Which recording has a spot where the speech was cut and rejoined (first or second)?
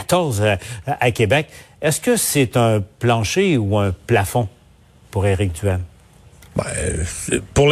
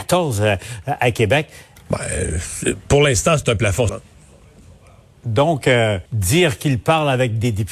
second